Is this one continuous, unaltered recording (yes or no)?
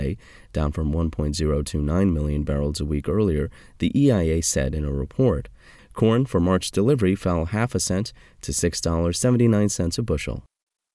no